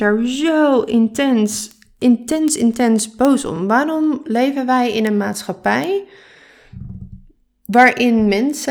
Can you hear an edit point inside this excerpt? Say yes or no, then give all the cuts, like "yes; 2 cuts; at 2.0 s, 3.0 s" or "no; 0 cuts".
no; 0 cuts